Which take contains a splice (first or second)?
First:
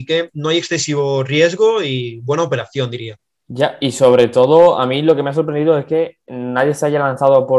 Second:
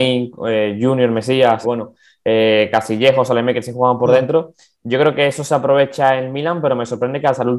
second